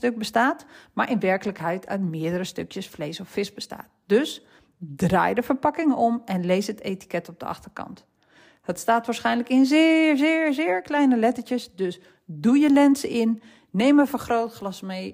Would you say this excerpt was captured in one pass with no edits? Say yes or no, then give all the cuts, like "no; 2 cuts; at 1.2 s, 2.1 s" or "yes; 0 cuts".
yes; 0 cuts